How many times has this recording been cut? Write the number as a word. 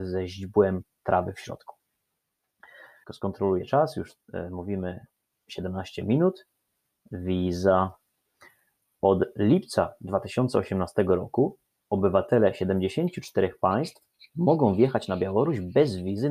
one